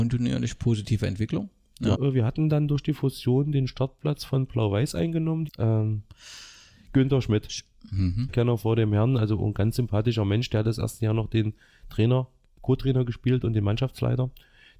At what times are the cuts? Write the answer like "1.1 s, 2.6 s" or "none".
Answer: 1.9 s, 5.5 s, 8.3 s